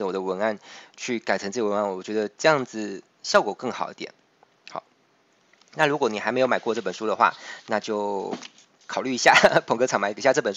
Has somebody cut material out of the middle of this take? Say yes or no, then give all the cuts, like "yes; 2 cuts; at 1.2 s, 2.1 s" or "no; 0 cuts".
no; 0 cuts